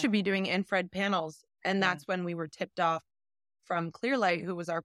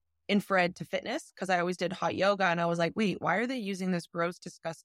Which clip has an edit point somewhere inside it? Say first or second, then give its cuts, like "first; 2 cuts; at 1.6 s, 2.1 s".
first; 1 cut; at 1.5 s